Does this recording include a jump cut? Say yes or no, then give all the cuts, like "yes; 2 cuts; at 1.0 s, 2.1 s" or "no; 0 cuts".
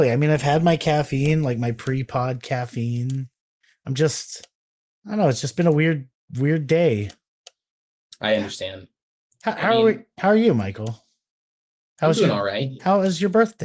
no; 0 cuts